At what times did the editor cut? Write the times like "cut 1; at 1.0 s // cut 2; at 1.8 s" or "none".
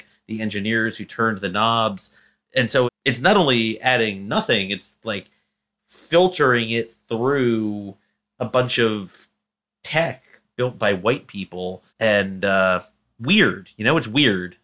cut 1; at 2.9 s // cut 2; at 11.9 s